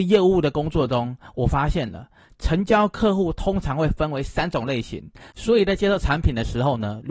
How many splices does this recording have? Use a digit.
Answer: 1